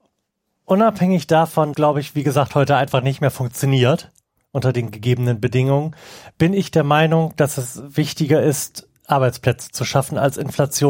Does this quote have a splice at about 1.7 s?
yes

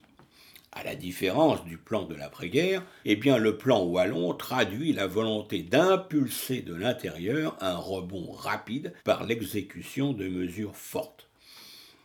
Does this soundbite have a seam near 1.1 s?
no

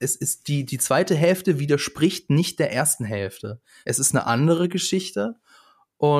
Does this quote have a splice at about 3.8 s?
yes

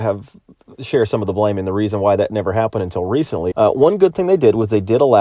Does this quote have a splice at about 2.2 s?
no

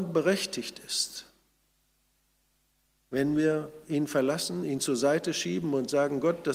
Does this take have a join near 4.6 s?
no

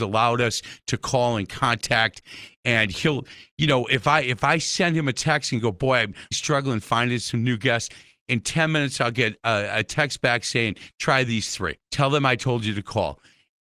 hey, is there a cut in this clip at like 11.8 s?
yes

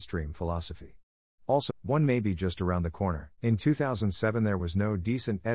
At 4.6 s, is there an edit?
no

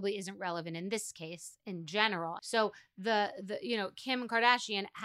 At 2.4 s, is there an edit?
yes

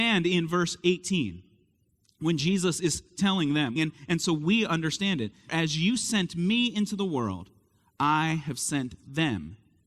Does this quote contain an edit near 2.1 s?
no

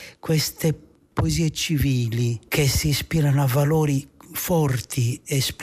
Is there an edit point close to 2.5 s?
yes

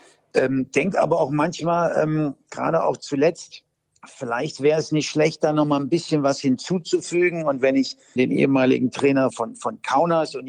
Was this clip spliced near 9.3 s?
yes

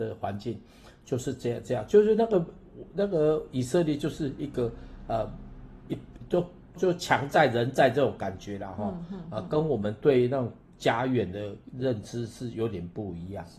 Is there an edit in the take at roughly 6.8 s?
yes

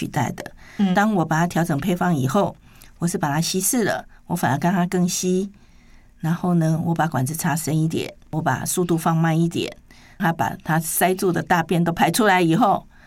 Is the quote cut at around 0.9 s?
yes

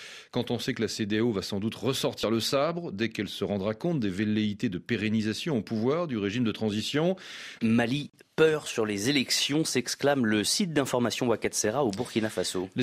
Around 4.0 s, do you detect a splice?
no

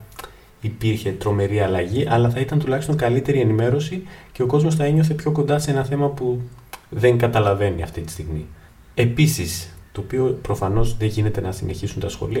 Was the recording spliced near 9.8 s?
yes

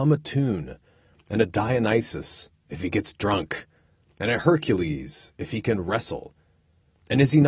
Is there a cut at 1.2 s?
no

